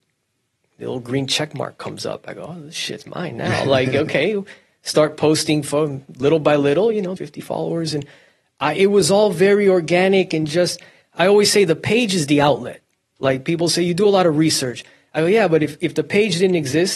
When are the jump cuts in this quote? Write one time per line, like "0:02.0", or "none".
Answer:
0:07.2

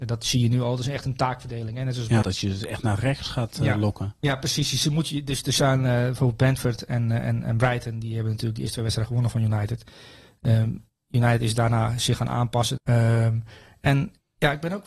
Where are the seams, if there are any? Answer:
0:02.2
0:12.8

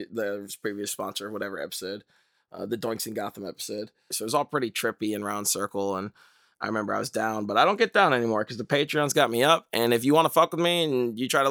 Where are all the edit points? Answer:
0:04.1

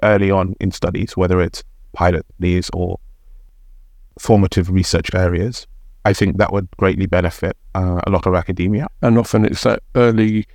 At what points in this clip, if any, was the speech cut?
0:08.9

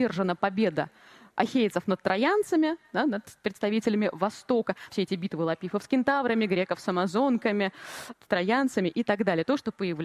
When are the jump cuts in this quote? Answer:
0:04.9
0:08.1

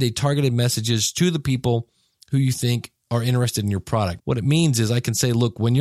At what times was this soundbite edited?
0:04.2

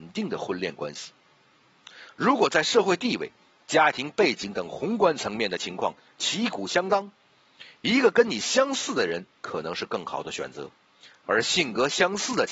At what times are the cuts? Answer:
0:11.3

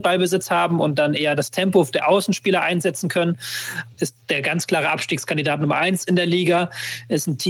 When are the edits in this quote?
0:03.8

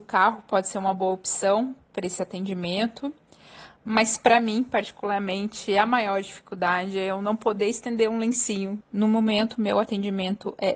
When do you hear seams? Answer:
none

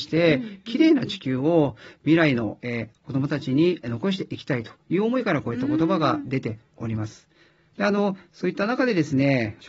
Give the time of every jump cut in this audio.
none

